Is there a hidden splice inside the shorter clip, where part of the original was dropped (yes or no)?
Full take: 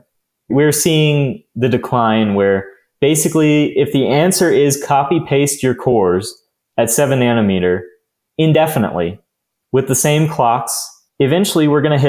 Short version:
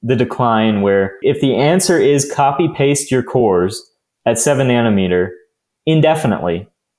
yes